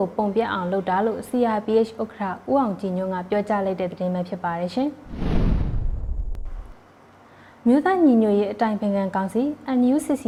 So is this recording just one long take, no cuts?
yes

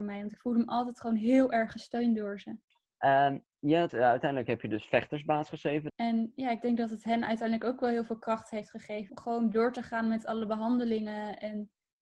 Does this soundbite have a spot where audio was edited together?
yes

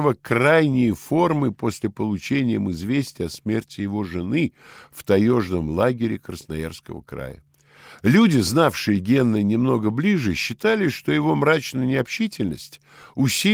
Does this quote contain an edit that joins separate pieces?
no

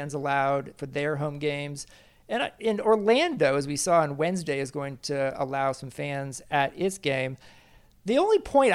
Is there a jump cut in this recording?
no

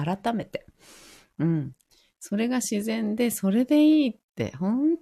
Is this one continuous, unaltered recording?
yes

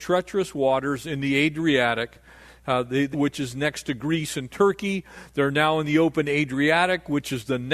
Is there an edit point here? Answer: yes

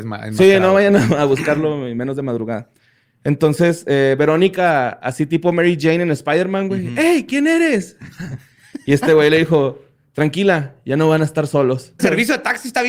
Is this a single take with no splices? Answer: no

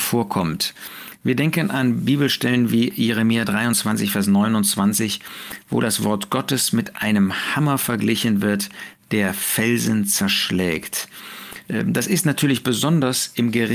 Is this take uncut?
yes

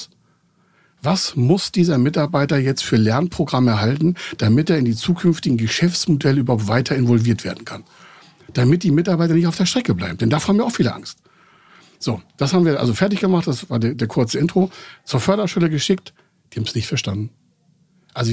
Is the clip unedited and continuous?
yes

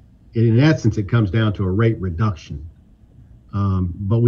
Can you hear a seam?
no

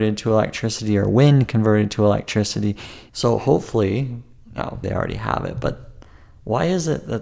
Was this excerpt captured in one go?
no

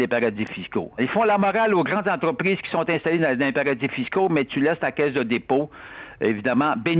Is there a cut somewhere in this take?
yes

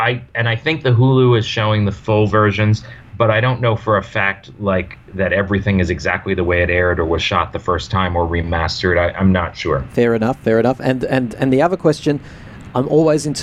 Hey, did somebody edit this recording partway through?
no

